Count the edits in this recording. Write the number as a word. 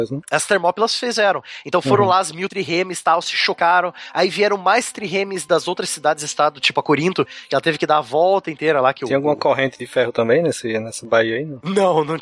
zero